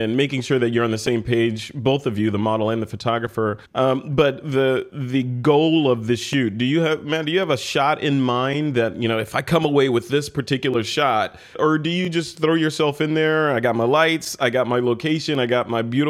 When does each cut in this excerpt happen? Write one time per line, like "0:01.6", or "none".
0:03.6
0:11.5